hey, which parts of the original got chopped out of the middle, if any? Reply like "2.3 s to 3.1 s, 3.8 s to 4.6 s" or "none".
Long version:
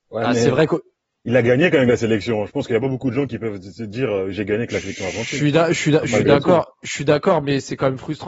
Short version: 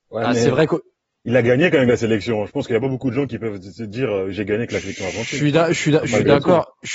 none